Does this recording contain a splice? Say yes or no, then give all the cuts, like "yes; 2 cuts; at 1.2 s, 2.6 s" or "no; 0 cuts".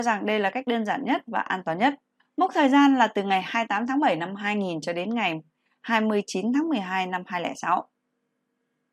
yes; 1 cut; at 2.2 s